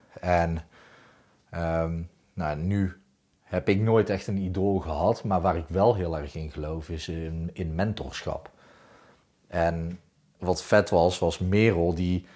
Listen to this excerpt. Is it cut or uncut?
cut